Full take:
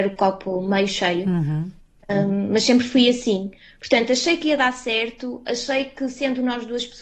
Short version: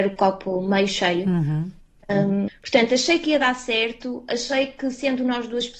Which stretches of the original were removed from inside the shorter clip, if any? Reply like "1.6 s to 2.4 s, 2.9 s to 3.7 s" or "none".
2.5 s to 3.7 s